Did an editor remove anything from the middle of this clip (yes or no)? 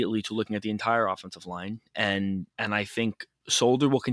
yes